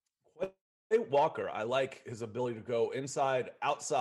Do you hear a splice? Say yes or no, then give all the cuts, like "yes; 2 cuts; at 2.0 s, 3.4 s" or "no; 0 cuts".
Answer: no; 0 cuts